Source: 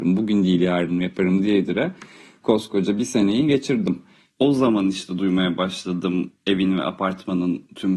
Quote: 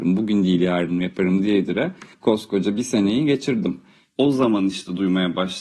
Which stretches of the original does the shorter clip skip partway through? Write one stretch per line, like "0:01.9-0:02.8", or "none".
0:02.1-0:02.3